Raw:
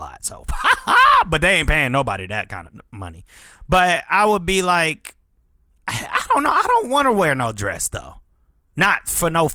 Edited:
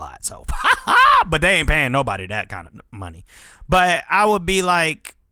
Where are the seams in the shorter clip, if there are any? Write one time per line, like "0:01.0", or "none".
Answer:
none